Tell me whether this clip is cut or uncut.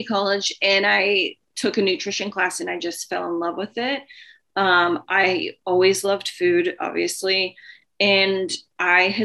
uncut